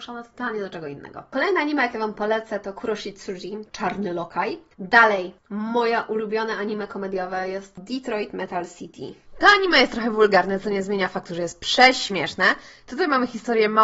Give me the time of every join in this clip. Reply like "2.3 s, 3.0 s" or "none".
none